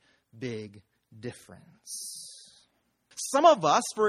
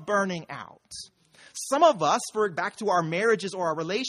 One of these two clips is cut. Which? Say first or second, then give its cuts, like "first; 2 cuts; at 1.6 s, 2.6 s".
first; 1 cut; at 3.1 s